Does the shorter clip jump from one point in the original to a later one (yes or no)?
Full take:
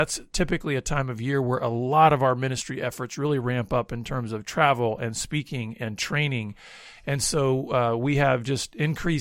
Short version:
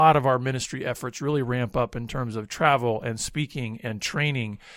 no